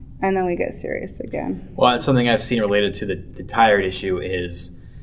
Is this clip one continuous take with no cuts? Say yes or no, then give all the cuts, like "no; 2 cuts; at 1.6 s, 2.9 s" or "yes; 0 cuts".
yes; 0 cuts